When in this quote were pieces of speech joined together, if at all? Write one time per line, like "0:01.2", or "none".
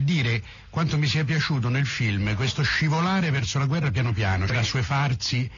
0:04.5